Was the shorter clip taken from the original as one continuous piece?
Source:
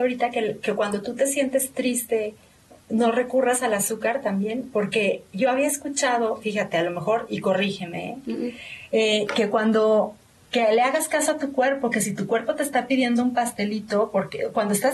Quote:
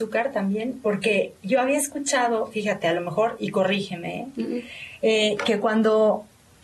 yes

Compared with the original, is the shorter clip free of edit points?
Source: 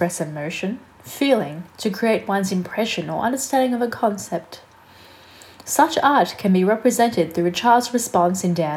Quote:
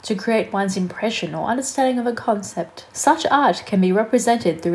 no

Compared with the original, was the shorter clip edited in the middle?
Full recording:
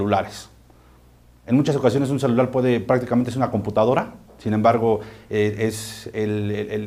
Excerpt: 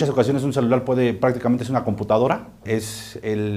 yes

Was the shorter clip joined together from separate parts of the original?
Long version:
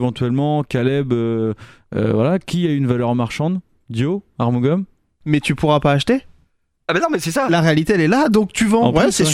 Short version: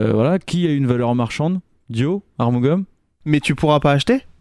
no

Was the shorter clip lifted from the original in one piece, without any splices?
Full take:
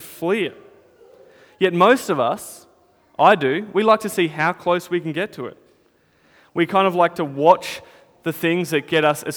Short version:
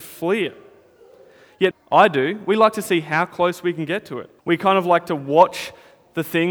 no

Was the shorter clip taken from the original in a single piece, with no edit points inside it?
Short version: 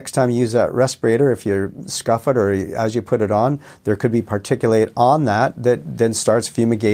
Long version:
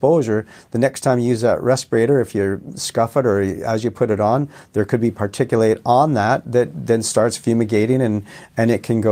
yes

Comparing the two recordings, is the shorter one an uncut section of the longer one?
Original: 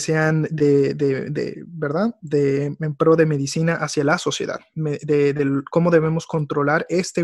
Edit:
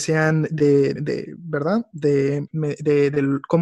no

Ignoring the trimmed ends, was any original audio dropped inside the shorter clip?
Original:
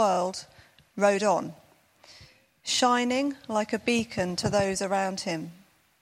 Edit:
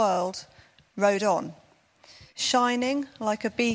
yes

